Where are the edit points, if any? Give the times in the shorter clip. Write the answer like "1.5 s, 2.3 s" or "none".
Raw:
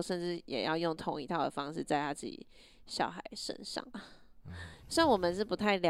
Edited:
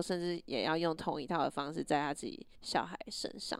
2.5 s